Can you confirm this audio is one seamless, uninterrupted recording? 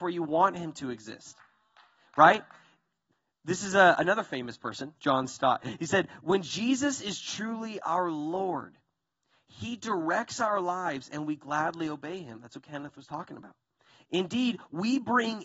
yes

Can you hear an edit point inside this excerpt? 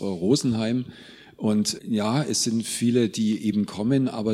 yes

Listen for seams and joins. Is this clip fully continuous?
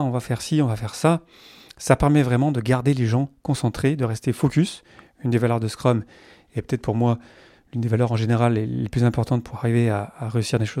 yes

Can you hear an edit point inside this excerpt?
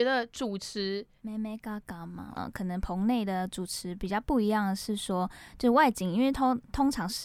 yes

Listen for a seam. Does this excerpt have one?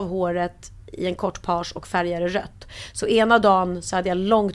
no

